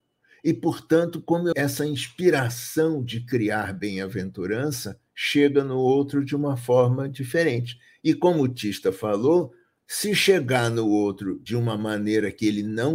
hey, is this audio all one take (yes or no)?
yes